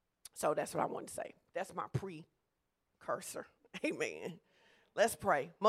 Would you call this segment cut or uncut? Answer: uncut